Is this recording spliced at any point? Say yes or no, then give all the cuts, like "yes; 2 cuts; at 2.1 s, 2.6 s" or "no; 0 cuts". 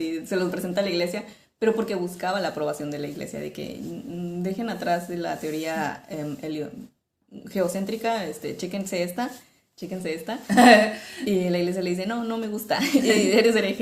no; 0 cuts